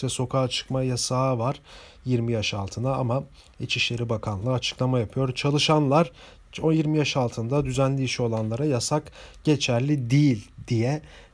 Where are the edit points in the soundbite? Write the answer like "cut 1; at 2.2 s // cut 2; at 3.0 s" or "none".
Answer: none